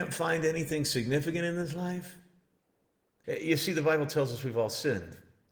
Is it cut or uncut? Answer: cut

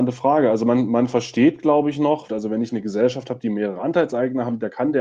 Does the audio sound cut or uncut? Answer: cut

